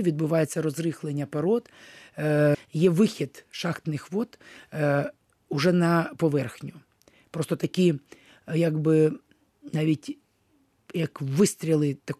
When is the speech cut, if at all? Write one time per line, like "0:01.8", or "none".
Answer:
0:02.5